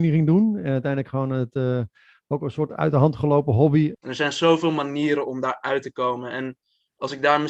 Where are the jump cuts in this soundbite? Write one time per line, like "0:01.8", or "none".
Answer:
0:03.9